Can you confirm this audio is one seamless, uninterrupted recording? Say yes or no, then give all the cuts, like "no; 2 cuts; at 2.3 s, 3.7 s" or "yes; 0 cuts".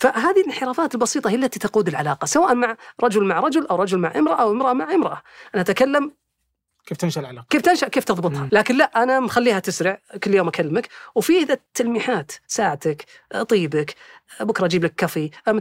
no; 2 cuts; at 8.5 s, 11.7 s